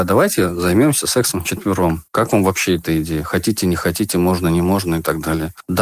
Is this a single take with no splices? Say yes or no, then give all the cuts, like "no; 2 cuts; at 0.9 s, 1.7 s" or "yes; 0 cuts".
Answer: yes; 0 cuts